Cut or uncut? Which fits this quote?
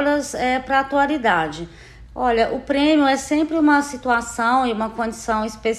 cut